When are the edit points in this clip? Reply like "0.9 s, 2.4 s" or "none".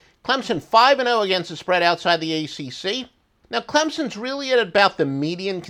3.4 s